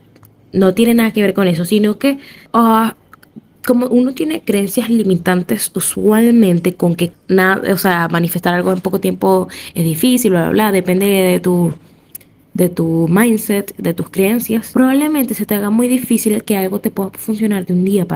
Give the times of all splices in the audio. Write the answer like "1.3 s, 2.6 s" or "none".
none